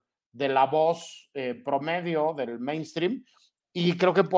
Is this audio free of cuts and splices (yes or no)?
yes